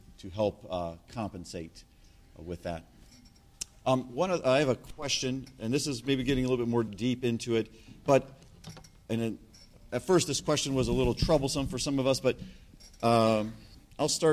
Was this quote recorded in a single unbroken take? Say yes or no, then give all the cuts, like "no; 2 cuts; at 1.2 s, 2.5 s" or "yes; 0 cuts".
no; 1 cut; at 6.9 s